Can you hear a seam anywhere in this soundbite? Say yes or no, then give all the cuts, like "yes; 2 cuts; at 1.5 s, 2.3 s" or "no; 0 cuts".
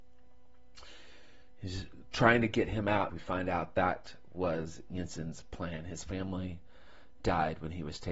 yes; 1 cut; at 3.1 s